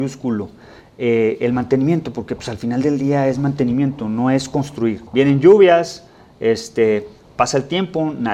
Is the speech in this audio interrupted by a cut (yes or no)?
yes